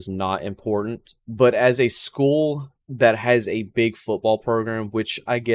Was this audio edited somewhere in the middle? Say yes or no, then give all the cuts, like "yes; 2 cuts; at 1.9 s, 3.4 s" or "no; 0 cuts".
yes; 2 cuts; at 1.2 s, 2.8 s